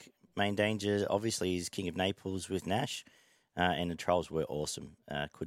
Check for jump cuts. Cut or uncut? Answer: uncut